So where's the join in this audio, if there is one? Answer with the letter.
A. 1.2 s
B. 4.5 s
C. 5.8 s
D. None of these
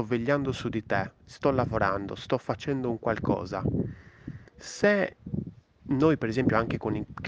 B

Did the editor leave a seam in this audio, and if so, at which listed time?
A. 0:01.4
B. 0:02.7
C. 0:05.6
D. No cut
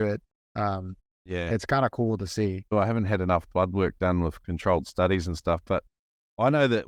B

